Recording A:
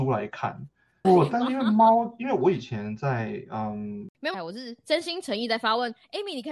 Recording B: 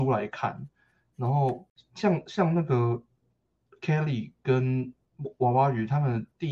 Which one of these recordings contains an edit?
A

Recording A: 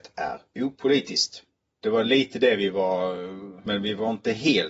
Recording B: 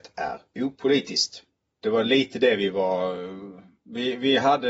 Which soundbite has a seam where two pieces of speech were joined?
A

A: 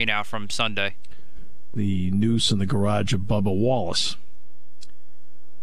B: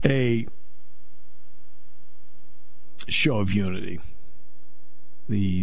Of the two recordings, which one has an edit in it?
A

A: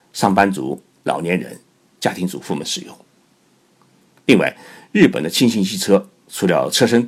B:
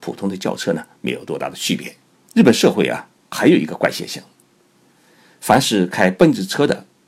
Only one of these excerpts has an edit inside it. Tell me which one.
B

